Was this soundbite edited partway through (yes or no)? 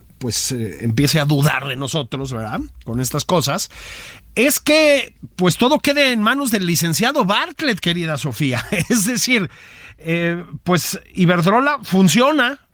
no